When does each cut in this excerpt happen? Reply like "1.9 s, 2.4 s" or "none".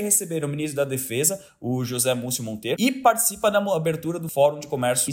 2.7 s